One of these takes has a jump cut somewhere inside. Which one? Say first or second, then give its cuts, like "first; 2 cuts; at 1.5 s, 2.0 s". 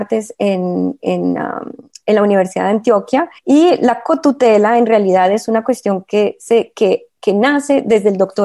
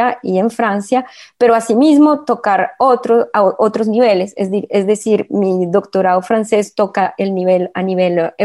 first; 1 cut; at 3.4 s